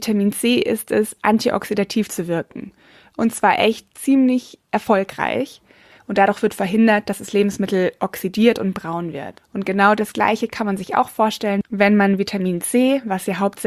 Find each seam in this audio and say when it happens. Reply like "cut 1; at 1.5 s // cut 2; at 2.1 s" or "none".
cut 1; at 6.0 s